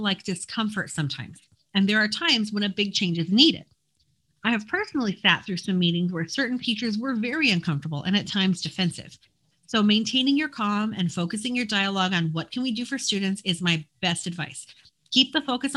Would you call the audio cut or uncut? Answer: uncut